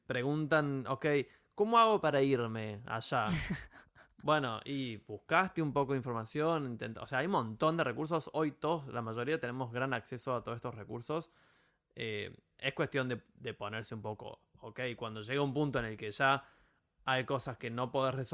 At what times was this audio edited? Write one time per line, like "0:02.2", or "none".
none